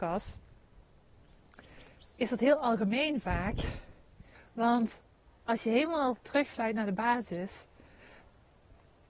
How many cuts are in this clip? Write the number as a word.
one